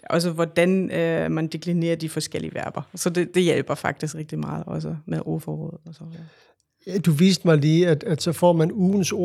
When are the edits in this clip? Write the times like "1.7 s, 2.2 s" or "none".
4.1 s